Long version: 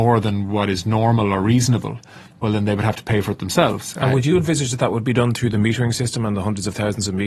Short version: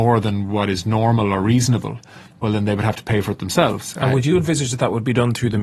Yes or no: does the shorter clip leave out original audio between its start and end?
no